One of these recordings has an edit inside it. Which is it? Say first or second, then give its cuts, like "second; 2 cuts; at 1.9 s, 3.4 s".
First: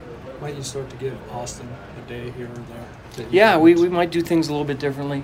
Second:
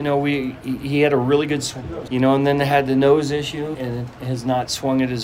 second; 2 cuts; at 2.1 s, 3.7 s